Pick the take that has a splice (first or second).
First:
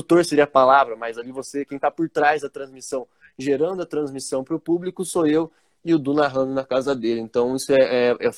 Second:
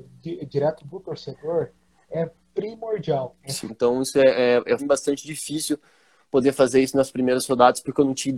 second